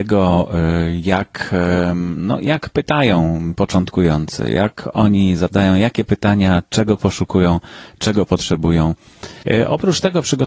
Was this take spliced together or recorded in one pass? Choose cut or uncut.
cut